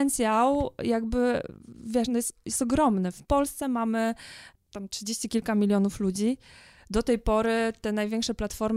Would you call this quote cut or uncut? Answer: uncut